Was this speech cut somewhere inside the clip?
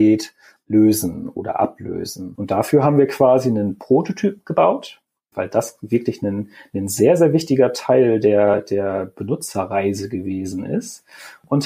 yes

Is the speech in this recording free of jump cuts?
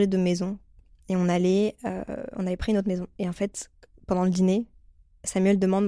yes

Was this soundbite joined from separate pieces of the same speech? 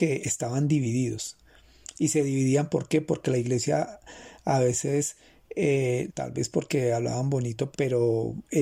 yes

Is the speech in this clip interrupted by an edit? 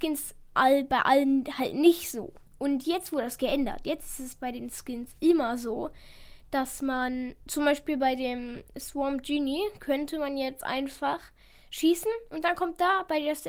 yes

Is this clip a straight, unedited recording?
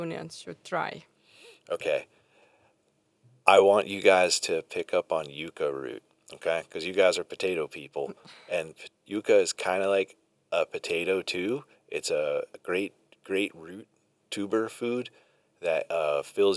yes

